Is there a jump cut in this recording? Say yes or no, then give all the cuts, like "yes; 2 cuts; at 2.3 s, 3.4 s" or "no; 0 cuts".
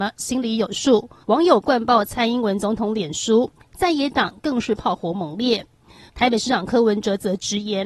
yes; 2 cuts; at 1.2 s, 6.1 s